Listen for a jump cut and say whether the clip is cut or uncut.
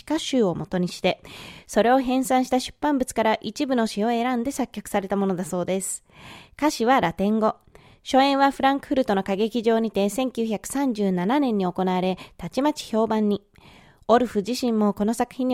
uncut